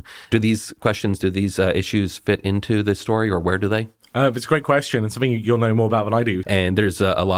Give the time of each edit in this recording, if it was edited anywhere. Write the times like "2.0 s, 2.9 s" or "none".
6.4 s